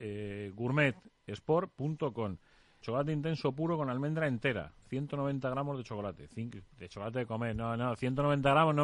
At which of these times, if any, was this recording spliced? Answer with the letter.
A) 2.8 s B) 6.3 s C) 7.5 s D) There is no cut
A